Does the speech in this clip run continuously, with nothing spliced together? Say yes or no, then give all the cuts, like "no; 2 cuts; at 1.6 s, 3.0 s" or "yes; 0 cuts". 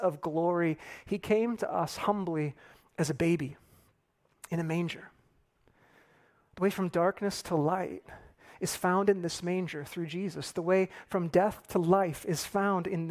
yes; 0 cuts